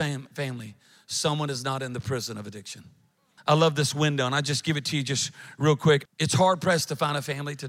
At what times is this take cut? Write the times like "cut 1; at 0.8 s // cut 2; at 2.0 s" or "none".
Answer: cut 1; at 3.4 s // cut 2; at 6.1 s